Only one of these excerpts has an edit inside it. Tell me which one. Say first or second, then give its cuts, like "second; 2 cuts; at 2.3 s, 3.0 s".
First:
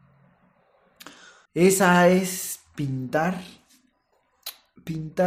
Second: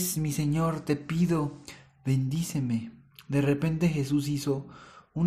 first; 1 cut; at 1.5 s